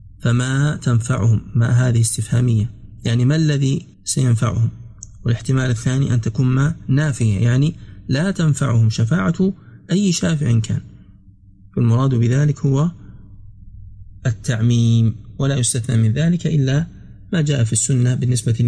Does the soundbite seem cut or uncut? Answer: cut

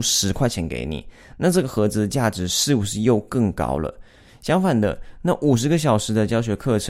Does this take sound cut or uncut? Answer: cut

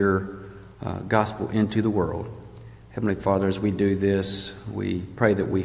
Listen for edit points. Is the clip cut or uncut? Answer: uncut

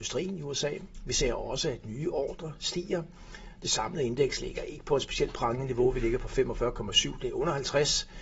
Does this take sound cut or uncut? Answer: uncut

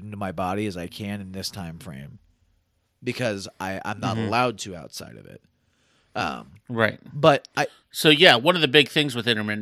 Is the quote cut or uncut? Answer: uncut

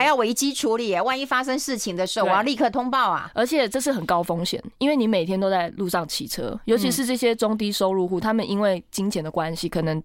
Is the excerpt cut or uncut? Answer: uncut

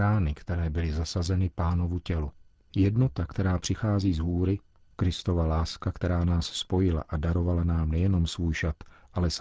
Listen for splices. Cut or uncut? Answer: uncut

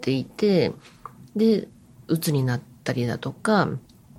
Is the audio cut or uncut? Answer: uncut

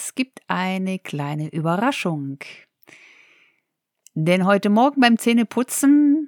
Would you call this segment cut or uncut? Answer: uncut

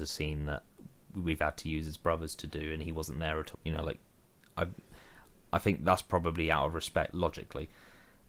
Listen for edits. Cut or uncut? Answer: cut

